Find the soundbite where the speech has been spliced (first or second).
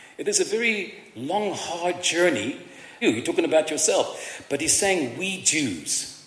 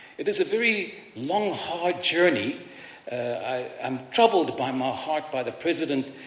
first